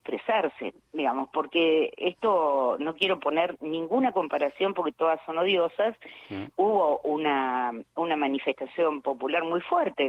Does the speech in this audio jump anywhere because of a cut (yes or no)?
yes